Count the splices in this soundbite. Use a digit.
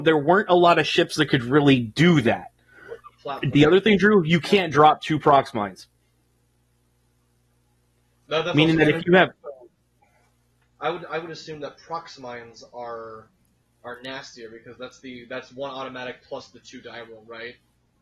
2